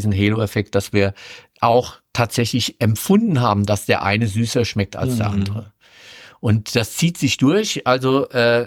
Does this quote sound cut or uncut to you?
uncut